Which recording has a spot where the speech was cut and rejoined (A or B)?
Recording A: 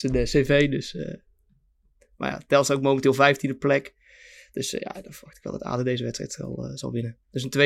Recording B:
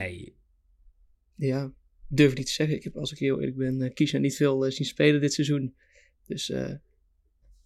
B